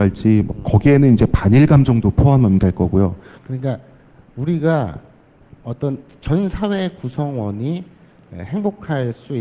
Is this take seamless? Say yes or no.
no